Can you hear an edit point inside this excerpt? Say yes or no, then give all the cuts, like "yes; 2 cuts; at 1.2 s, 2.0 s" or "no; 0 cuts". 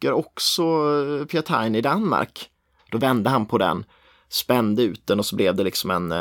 yes; 1 cut; at 2.8 s